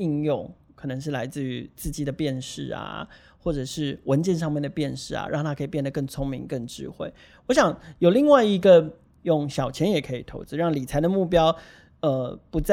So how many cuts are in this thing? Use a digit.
1